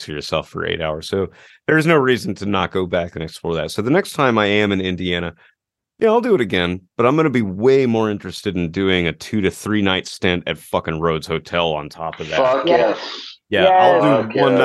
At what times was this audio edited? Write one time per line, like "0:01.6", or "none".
none